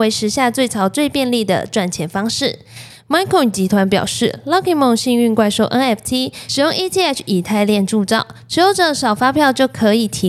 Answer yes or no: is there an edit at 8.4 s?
no